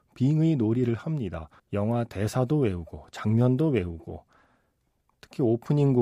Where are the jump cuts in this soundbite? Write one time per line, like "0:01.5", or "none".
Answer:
0:01.6